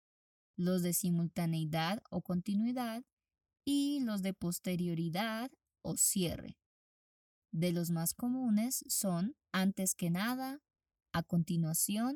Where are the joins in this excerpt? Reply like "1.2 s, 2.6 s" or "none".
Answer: 9.4 s